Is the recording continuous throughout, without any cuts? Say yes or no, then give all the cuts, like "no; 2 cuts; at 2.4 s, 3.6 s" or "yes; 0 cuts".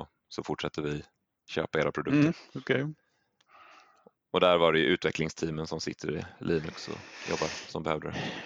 yes; 0 cuts